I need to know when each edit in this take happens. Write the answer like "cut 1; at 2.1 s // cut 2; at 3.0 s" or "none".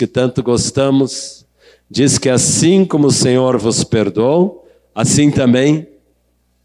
none